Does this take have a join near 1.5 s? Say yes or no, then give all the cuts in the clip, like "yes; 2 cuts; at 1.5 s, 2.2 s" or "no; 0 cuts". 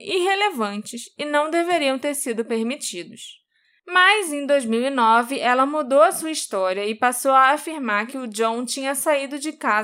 no; 1 cut; at 3.8 s